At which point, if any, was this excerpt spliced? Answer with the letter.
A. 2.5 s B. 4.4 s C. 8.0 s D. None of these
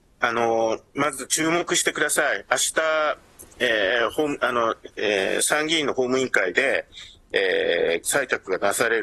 C